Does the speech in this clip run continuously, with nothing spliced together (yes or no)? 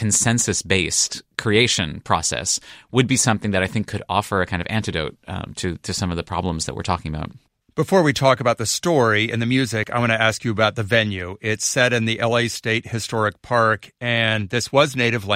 yes